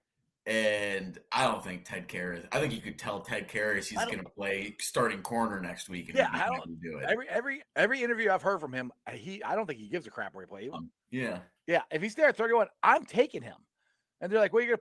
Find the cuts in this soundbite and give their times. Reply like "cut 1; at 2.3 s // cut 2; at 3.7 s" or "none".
cut 1; at 7.6 s // cut 2; at 10.7 s